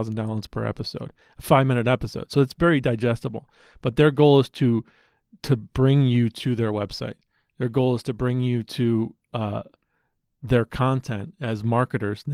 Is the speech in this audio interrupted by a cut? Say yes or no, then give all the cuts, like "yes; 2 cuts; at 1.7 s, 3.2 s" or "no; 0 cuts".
no; 0 cuts